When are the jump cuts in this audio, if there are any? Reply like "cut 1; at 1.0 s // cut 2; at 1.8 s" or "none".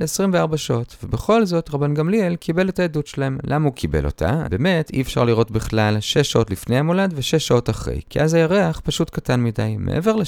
cut 1; at 4.4 s